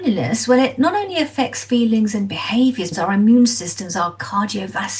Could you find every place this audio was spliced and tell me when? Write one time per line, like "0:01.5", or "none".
0:02.9